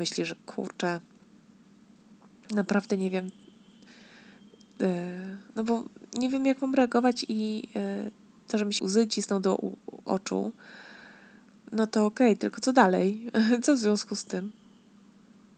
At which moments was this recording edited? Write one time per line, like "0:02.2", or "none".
0:08.8